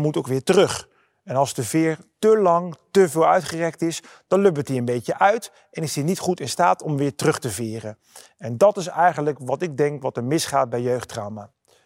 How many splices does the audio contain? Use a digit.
0